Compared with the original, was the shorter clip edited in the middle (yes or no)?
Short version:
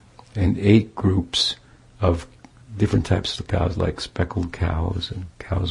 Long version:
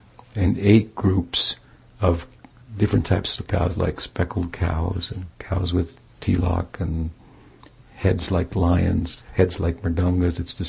no